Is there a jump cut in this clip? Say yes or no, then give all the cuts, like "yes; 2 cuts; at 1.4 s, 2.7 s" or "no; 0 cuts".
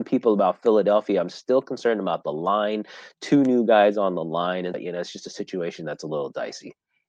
yes; 1 cut; at 4.7 s